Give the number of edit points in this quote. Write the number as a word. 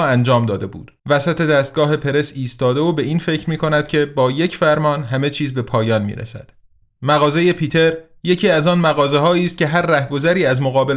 two